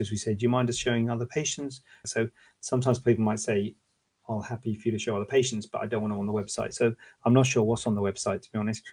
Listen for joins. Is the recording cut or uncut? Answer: cut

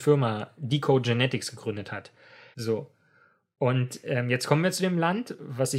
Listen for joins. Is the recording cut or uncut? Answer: cut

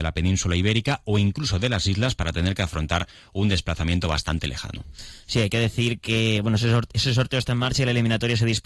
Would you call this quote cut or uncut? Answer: uncut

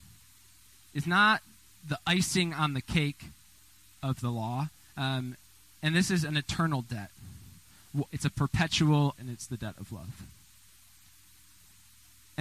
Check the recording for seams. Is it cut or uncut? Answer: cut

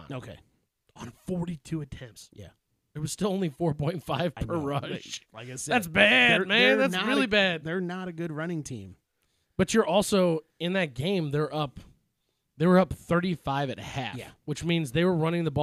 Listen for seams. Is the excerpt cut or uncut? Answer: uncut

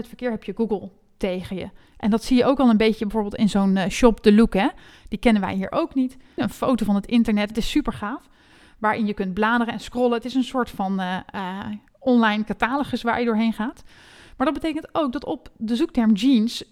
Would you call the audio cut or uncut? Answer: cut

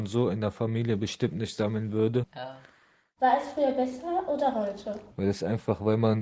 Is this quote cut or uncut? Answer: cut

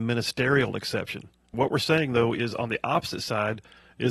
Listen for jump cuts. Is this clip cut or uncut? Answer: cut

